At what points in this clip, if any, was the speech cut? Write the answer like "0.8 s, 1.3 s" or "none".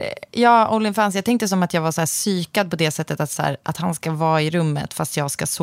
none

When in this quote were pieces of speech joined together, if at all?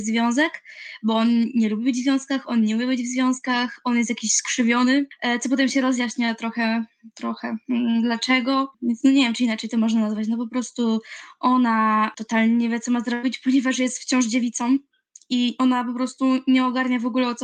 none

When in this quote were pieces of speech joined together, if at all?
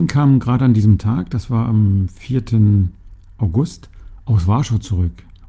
none

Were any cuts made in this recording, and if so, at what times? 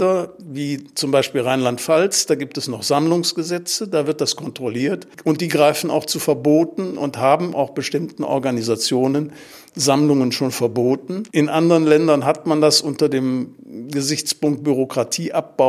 11.3 s

